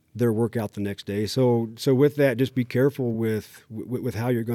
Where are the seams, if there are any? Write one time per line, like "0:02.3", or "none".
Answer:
none

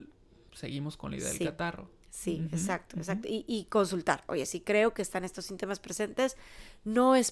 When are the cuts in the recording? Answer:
none

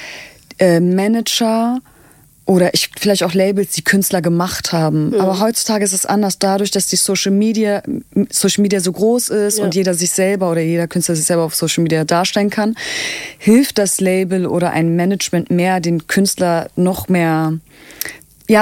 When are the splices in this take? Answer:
none

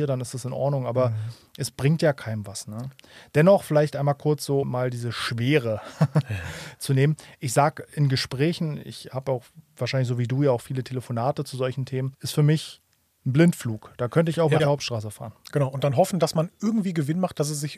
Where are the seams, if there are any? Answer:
0:04.6
0:12.1
0:14.6

